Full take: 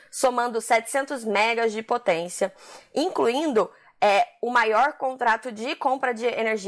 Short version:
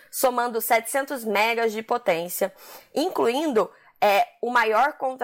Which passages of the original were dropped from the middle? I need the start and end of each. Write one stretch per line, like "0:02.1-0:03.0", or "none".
none